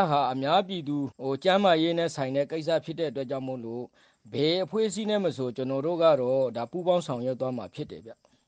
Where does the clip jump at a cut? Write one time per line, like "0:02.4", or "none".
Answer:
0:01.1